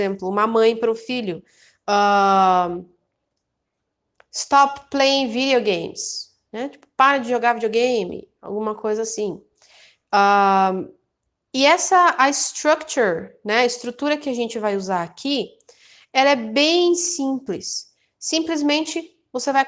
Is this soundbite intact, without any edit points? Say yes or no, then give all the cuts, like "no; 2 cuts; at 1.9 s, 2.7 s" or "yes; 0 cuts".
yes; 0 cuts